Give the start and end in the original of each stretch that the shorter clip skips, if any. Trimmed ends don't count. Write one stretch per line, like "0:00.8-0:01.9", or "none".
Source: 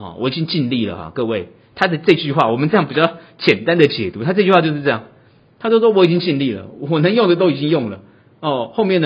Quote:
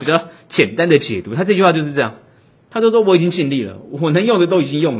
none